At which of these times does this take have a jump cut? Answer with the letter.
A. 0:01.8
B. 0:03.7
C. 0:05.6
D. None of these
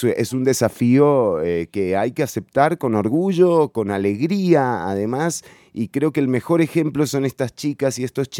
D